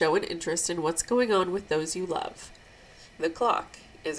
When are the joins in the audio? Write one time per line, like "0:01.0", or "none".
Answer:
0:03.1